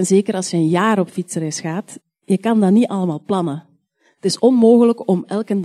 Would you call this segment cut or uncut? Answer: uncut